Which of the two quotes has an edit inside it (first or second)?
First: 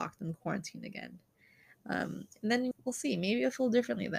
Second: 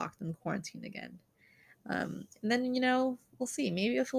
first